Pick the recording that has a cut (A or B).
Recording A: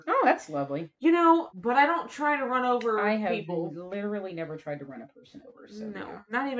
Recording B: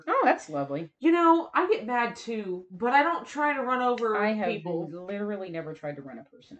A